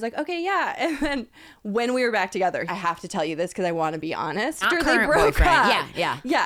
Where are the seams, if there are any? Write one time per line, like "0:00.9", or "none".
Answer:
0:02.7
0:04.6